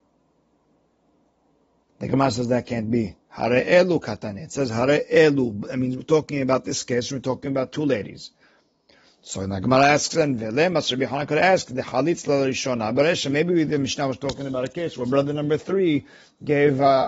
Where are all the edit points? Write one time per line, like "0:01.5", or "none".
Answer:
none

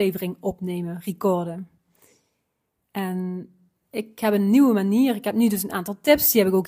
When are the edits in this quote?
none

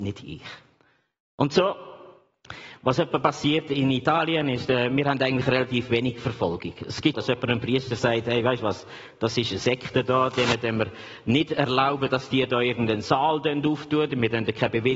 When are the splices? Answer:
0:07.1

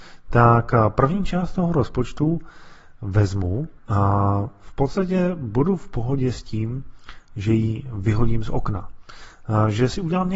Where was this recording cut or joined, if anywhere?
0:03.8

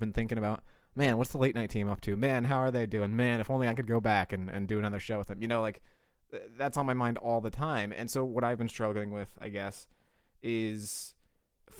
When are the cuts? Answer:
none

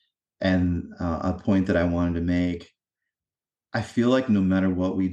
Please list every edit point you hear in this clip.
none

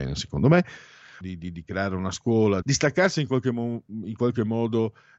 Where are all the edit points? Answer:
0:01.2
0:02.6

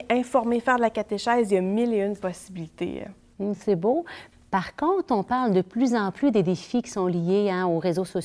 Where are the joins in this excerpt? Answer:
none

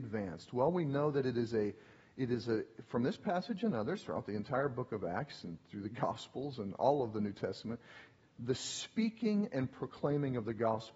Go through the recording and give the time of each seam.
none

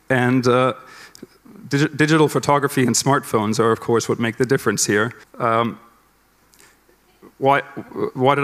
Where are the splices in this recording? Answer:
0:05.2

